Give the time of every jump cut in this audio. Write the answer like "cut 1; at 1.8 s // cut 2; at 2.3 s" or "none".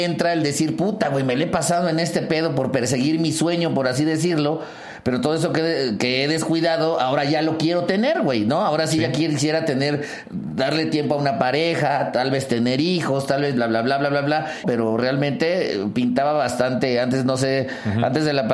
cut 1; at 14.6 s

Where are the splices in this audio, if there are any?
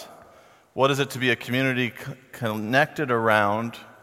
none

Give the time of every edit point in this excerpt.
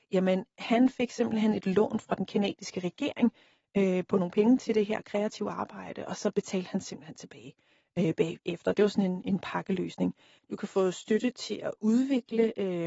cut 1; at 10.4 s

